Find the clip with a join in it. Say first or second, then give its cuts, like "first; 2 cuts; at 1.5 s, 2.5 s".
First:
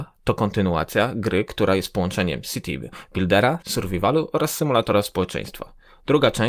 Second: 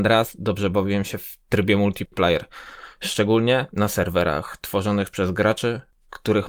first; 1 cut; at 3.6 s